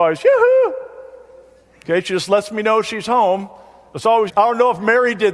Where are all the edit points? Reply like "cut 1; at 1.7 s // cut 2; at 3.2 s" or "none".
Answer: cut 1; at 4.3 s